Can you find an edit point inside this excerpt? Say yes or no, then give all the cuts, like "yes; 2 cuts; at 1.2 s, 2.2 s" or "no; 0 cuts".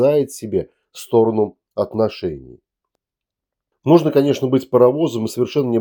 no; 0 cuts